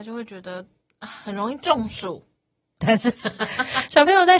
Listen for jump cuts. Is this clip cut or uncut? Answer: cut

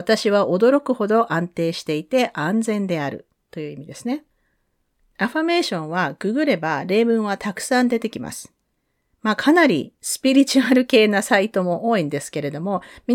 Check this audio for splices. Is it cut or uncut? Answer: cut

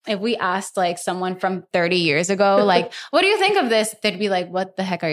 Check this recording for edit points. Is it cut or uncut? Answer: uncut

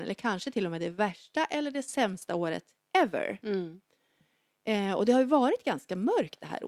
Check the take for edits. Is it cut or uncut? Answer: uncut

